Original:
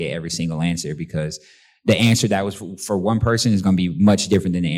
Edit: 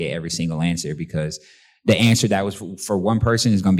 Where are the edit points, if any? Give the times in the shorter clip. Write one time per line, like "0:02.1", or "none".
none